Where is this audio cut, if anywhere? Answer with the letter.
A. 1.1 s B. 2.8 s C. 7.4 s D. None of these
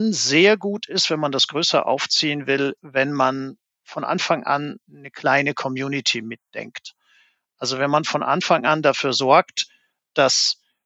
B